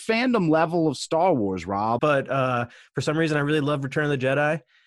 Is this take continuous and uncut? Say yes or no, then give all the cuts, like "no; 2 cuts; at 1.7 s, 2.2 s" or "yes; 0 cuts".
no; 1 cut; at 2.0 s